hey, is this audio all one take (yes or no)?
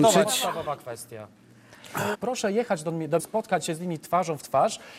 no